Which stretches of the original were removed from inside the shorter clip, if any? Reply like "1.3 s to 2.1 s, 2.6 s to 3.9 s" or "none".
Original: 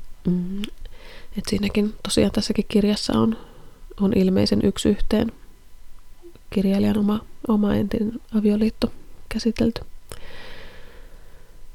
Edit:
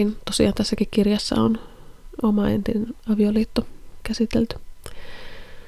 3.9 s to 7.4 s